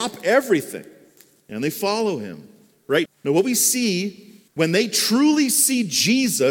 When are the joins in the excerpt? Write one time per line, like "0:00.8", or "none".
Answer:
0:03.1
0:04.5